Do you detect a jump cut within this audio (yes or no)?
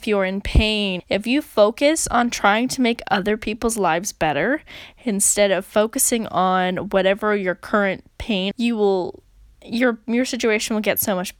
yes